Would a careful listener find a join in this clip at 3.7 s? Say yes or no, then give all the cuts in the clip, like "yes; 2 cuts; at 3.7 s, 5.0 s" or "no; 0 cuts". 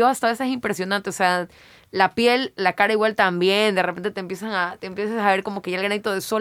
no; 0 cuts